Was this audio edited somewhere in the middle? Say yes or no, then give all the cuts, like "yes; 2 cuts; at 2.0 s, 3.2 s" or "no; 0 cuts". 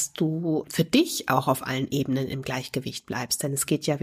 no; 0 cuts